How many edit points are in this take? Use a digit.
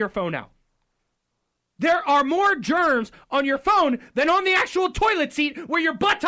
0